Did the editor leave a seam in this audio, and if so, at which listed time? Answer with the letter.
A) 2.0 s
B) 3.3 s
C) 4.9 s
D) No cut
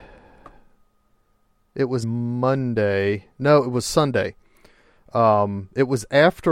A